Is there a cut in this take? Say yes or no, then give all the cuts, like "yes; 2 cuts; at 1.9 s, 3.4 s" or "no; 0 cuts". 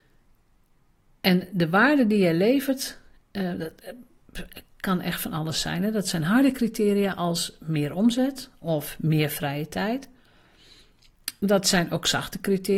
no; 0 cuts